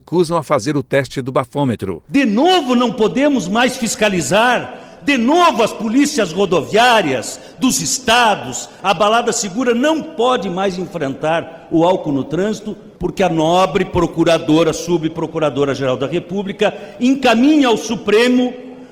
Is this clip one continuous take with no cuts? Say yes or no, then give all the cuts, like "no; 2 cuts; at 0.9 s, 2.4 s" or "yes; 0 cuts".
no; 1 cut; at 8.8 s